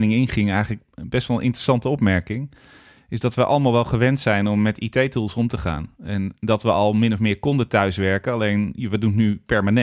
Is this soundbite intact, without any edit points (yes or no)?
yes